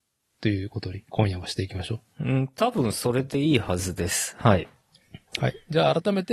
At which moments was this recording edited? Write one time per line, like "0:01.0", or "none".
none